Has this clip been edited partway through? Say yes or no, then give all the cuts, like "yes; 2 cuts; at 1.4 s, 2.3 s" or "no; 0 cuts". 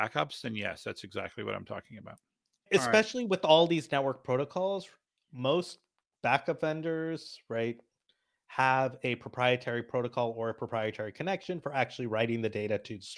no; 0 cuts